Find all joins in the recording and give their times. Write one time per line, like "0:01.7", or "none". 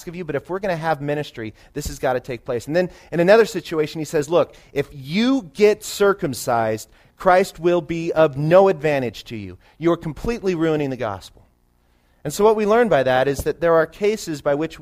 none